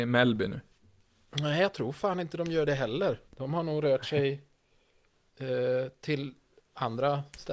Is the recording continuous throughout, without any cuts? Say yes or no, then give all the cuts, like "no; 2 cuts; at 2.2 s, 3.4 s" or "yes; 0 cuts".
no; 1 cut; at 3.3 s